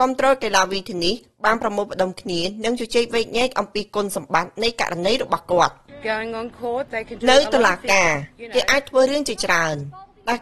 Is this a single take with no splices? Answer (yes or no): yes